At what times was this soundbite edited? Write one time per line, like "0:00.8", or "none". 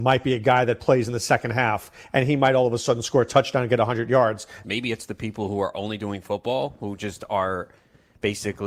0:04.6